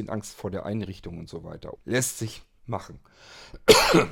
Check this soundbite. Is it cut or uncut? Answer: cut